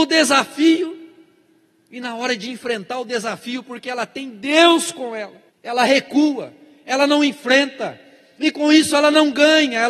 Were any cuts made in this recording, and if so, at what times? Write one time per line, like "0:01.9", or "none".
0:05.5